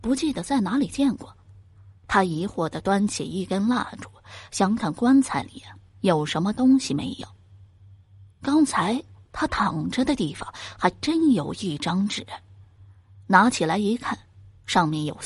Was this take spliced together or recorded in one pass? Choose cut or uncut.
cut